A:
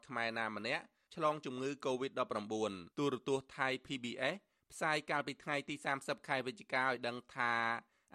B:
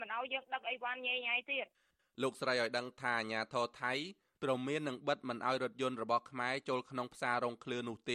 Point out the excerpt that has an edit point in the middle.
A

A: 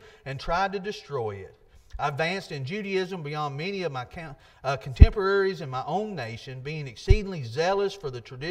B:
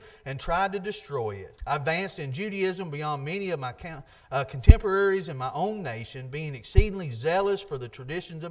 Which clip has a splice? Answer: B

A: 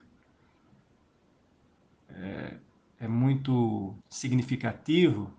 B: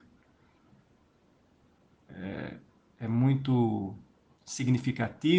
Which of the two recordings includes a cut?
A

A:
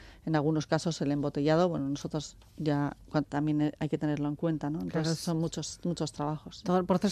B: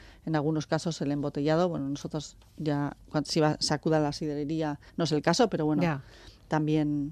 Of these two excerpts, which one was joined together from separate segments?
A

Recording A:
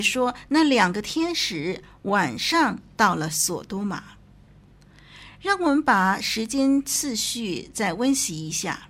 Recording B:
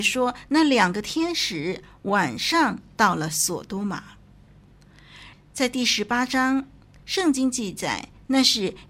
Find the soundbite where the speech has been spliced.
B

